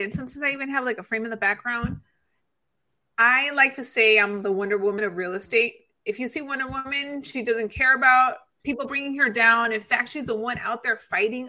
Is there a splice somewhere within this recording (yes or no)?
yes